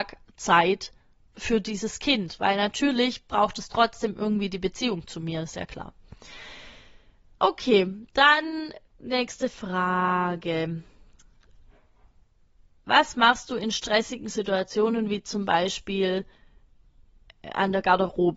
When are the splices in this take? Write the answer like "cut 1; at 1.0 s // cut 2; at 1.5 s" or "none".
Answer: none